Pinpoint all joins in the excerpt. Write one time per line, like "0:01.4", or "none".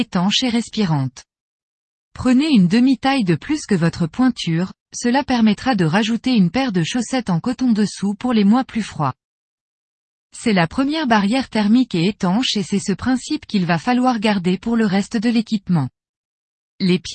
none